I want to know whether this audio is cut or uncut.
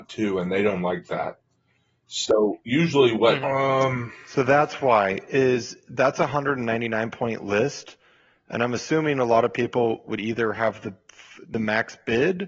cut